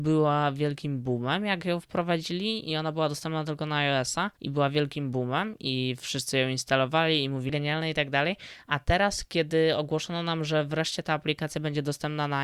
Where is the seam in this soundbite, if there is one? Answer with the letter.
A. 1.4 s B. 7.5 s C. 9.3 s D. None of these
B